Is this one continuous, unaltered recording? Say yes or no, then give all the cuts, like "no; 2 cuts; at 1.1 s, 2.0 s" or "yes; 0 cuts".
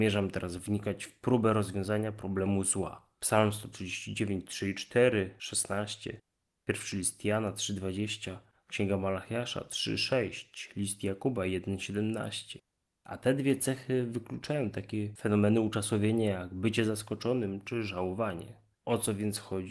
no; 3 cuts; at 3.2 s, 8.5 s, 18.7 s